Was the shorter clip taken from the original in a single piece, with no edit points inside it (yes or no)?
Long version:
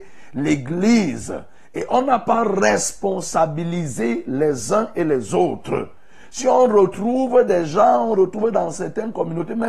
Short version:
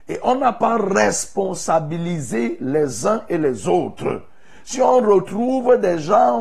yes